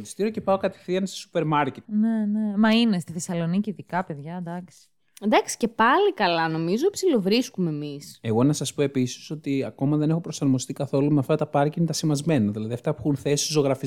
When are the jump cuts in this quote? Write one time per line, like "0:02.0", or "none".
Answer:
0:01.8